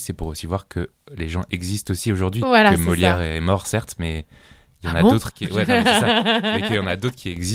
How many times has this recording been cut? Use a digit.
0